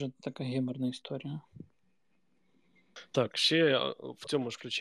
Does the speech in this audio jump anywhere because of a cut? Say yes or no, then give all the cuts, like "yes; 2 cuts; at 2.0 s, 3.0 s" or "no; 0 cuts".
no; 0 cuts